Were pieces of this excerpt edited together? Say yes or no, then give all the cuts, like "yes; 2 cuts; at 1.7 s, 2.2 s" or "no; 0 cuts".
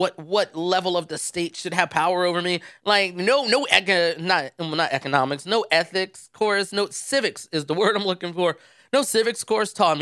no; 0 cuts